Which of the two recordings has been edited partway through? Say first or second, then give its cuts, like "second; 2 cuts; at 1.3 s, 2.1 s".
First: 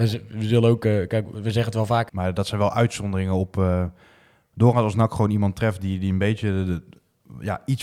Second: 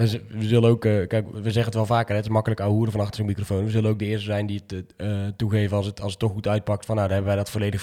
first; 1 cut; at 2.1 s